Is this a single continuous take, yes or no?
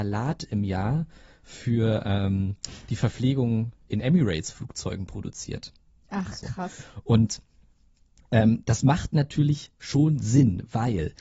yes